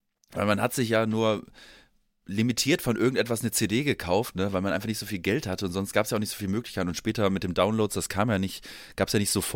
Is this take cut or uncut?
uncut